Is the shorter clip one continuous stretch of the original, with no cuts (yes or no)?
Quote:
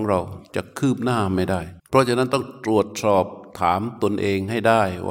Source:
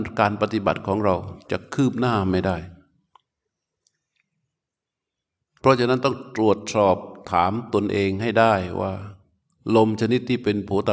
no